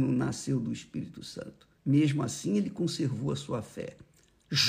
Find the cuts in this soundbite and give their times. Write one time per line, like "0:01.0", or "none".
0:01.8

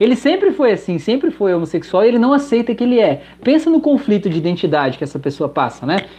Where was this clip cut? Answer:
none

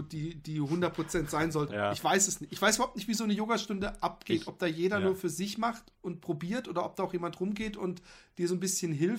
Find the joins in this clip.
0:01.7

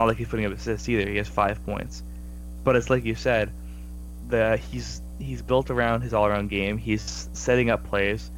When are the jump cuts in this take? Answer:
none

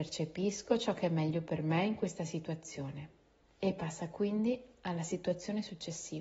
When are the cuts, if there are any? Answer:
none

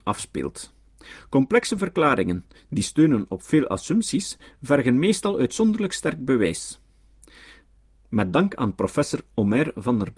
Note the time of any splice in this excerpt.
none

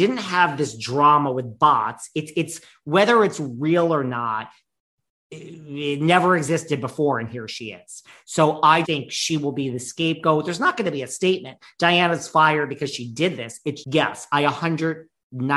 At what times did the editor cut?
0:08.8
0:13.8

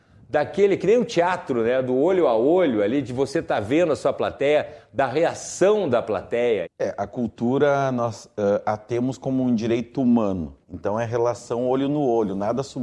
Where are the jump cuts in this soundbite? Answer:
0:06.6
0:10.6

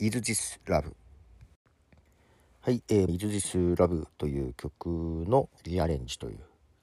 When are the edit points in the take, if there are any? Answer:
0:03.1
0:05.6

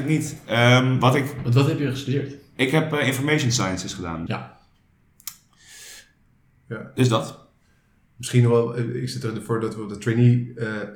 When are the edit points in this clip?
0:04.3

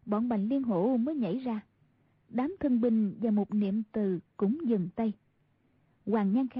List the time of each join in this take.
none

